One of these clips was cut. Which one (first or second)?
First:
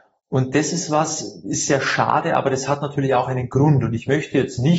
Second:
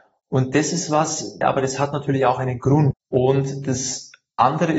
second